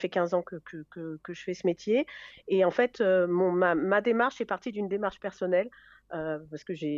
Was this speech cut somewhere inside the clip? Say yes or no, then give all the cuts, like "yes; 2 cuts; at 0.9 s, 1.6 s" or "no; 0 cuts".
no; 0 cuts